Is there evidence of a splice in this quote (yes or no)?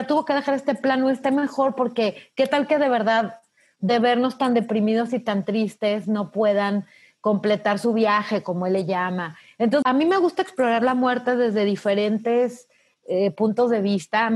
yes